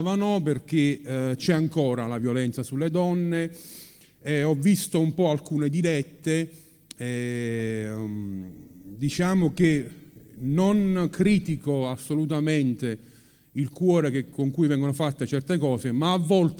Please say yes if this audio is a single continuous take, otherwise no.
yes